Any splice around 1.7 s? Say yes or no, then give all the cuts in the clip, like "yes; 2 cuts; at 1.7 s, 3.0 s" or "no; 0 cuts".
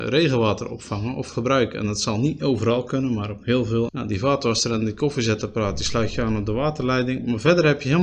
no; 1 cut; at 3.9 s